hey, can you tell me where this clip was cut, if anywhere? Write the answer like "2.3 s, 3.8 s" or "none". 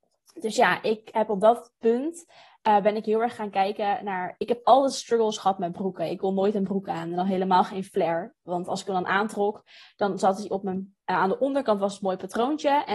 none